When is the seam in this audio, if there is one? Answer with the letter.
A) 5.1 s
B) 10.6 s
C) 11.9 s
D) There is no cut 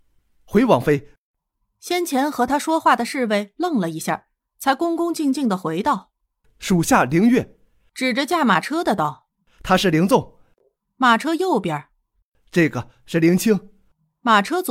D